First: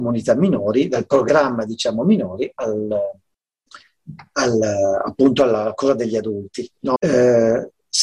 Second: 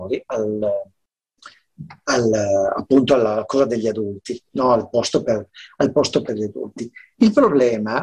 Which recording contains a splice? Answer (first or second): first